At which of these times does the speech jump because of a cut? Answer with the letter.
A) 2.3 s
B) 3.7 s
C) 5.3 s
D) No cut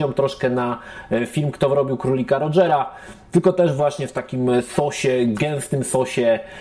D